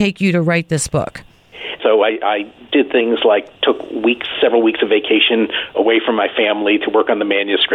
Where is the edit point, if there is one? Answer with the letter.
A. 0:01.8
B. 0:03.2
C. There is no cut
A